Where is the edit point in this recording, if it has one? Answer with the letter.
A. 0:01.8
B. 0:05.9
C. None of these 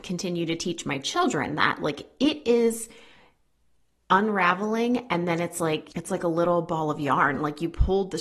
B